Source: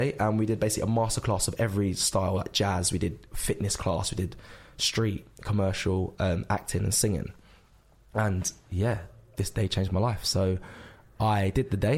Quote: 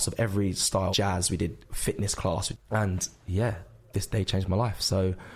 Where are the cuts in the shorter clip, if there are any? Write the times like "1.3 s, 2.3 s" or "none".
0.9 s, 2.5 s